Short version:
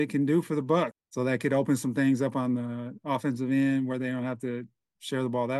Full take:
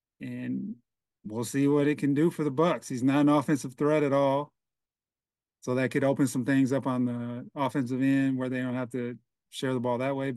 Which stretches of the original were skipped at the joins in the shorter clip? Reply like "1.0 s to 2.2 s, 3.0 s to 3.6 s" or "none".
2.8 s to 5.4 s